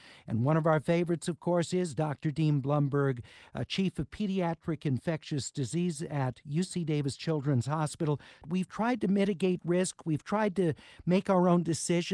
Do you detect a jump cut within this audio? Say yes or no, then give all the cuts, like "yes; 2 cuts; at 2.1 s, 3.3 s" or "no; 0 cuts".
yes; 1 cut; at 8.4 s